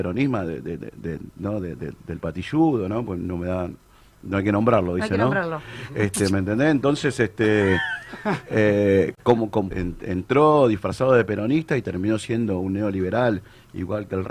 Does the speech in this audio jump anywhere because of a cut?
yes; 1 cut; at 9.7 s

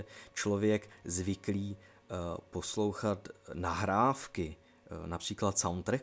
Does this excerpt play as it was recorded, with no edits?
yes; 0 cuts

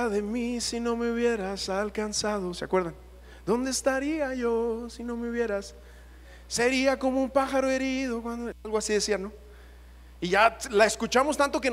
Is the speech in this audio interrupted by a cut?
no; 0 cuts

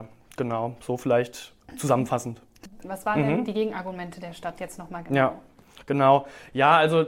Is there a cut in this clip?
yes; 1 cut; at 2.8 s

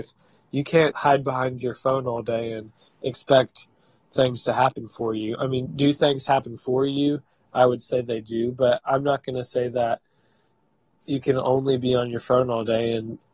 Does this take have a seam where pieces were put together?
yes; 2 cuts; at 0.9 s, 5.7 s

